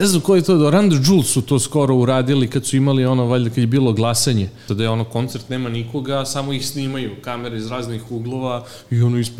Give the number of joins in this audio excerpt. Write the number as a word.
one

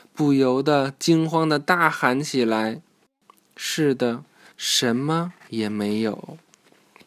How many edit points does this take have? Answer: one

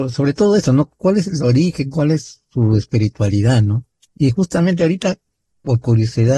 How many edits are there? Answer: one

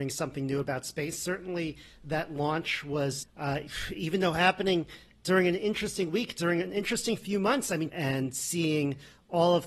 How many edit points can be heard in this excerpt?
two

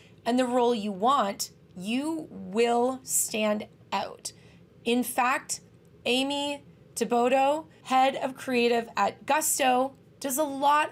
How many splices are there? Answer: zero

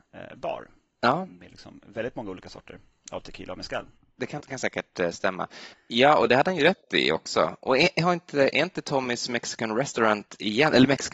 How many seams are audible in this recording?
two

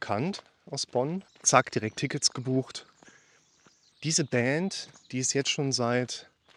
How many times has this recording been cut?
two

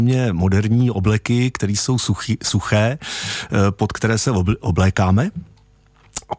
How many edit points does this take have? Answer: zero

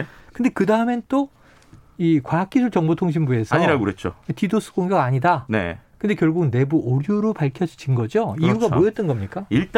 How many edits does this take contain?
zero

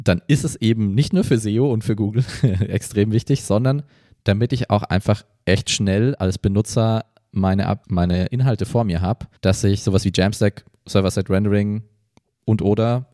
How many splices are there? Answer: two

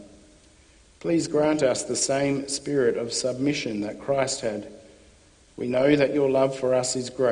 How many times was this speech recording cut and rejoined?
one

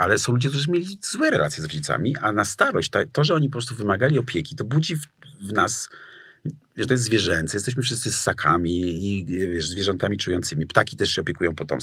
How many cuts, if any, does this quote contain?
one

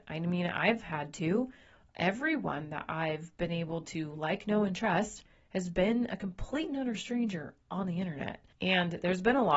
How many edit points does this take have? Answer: one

